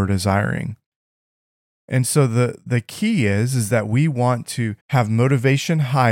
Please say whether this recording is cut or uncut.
cut